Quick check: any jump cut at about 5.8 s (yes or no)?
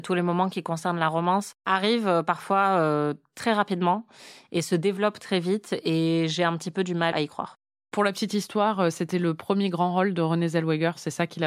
no